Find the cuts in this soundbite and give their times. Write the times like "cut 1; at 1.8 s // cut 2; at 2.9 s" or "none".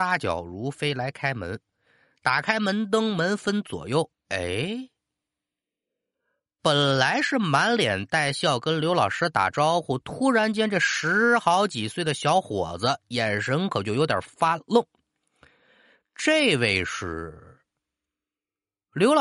cut 1; at 4.1 s